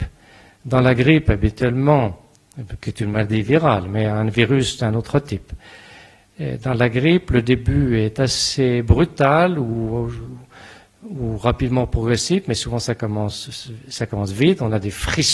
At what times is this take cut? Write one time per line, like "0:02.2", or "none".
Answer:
none